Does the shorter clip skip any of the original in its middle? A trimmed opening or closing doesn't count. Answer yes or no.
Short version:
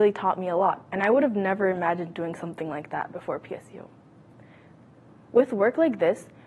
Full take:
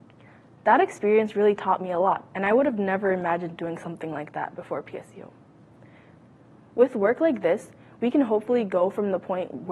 no